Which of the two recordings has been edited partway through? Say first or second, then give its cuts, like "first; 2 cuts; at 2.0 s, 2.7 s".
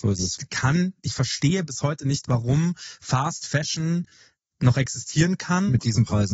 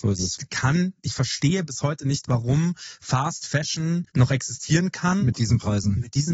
second; 1 cut; at 4.1 s